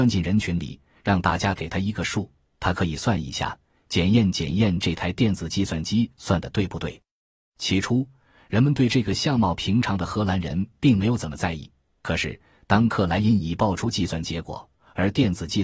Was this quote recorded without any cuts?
yes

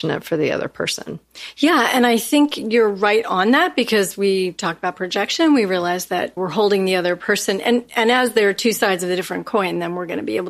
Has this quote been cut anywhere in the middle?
yes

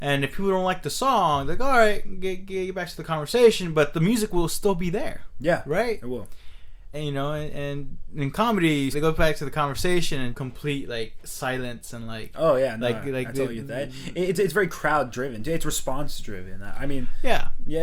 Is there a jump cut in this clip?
yes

